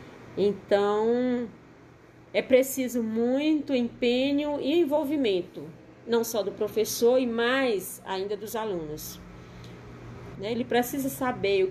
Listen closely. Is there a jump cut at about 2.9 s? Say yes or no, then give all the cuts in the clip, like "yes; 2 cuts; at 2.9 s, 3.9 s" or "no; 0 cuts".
no; 1 cut; at 10.3 s